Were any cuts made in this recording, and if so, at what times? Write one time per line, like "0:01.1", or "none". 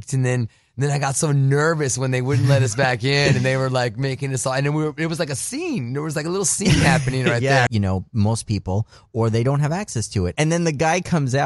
0:07.7
0:10.3